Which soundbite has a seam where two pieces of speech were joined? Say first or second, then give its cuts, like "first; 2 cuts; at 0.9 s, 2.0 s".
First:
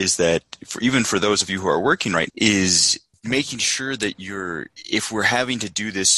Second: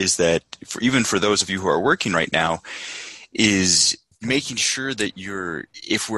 first; 1 cut; at 2.3 s